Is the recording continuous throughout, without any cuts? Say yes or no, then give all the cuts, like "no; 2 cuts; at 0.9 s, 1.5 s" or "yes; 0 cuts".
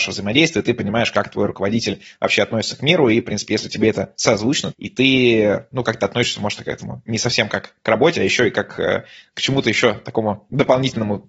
no; 1 cut; at 4.7 s